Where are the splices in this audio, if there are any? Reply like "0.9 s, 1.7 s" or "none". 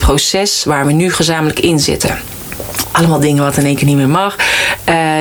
2.8 s